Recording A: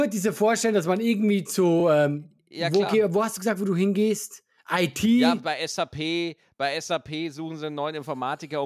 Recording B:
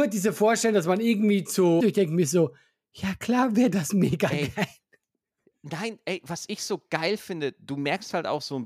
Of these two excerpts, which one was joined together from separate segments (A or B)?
B